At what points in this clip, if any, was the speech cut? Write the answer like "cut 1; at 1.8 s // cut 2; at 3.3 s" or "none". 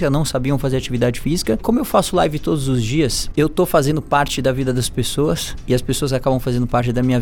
cut 1; at 1.6 s // cut 2; at 3.3 s